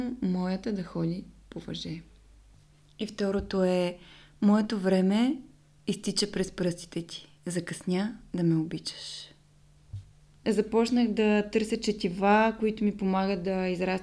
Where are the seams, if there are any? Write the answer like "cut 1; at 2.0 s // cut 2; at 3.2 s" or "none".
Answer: cut 1; at 10.4 s